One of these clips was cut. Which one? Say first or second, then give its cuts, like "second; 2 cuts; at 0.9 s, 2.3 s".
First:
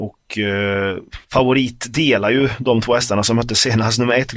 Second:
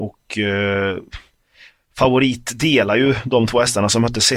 first; 1 cut; at 1.2 s